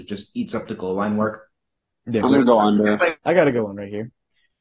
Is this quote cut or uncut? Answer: cut